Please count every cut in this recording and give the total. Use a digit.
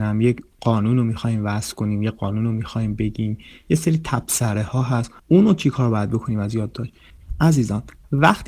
1